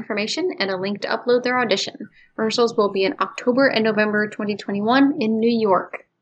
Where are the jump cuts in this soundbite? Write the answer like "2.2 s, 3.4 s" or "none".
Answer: none